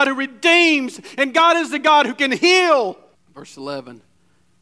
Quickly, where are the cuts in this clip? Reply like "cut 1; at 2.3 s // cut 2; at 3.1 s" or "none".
cut 1; at 3.1 s